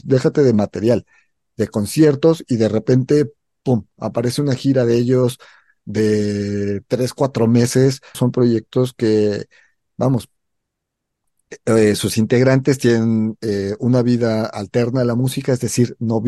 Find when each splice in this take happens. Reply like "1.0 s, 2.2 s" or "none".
8.1 s